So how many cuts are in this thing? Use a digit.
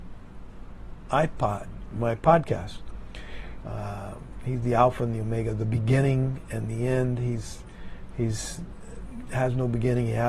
1